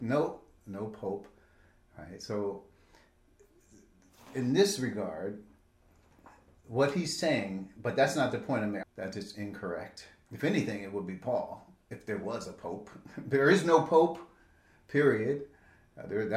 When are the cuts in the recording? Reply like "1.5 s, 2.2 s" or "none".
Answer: 8.8 s